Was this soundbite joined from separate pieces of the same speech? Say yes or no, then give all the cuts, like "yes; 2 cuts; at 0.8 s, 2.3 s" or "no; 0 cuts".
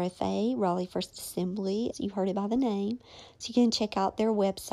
yes; 1 cut; at 1.9 s